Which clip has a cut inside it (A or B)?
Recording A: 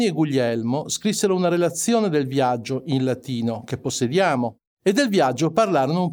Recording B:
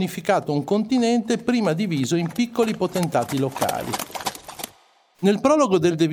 B